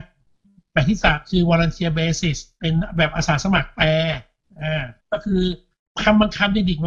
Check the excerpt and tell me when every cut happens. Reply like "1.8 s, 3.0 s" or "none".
5.0 s